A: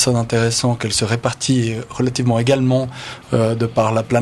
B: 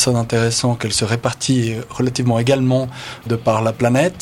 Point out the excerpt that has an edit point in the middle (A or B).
B